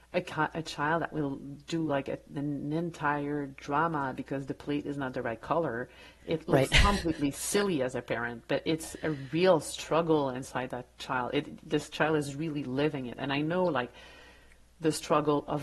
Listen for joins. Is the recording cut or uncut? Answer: uncut